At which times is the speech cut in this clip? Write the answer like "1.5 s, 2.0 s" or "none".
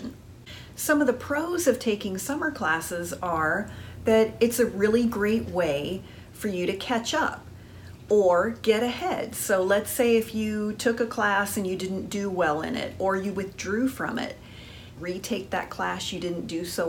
15.0 s